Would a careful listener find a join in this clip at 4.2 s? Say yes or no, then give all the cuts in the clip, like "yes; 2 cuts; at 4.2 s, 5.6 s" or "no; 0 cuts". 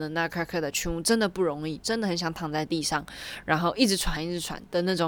yes; 2 cuts; at 1.8 s, 4.2 s